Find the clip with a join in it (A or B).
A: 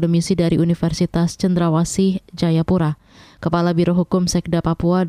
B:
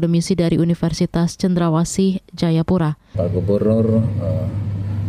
B